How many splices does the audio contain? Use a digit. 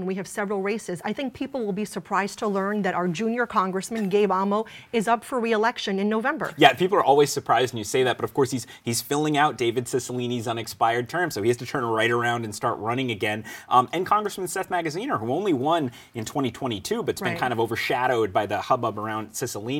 0